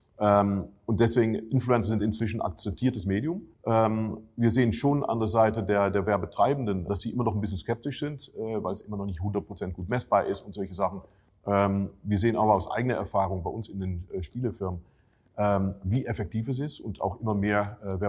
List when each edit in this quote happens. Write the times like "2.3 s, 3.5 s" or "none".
3.5 s, 6.9 s